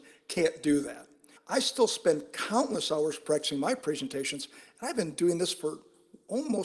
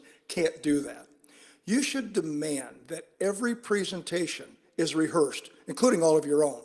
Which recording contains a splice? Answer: first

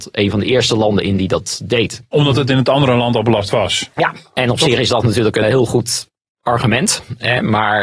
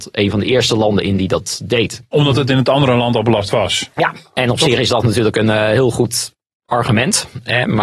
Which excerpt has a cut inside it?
first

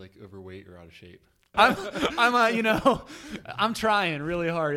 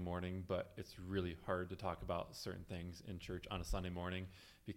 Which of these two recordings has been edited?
first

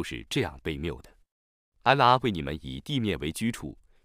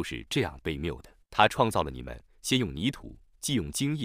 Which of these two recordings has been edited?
second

